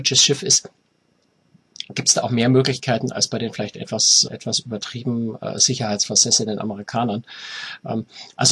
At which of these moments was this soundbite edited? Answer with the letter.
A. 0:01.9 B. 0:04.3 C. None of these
B